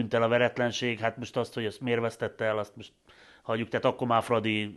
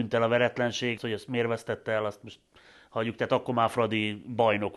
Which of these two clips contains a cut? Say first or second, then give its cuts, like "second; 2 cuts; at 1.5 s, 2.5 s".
second; 1 cut; at 1.0 s